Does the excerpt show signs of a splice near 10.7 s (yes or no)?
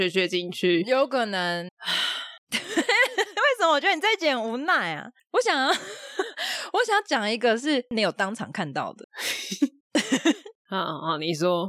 no